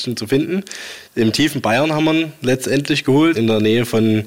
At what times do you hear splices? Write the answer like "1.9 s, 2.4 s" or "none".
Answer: 3.3 s